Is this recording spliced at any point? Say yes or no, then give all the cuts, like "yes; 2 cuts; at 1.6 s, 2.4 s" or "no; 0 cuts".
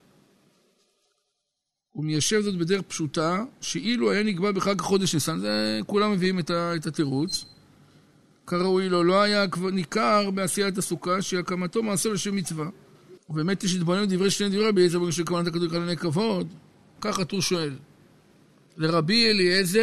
yes; 2 cuts; at 13.2 s, 17.0 s